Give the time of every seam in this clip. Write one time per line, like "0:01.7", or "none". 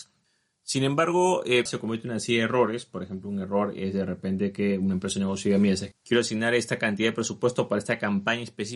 0:01.7
0:05.9